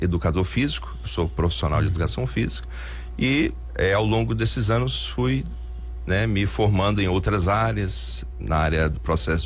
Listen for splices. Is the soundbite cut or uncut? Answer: uncut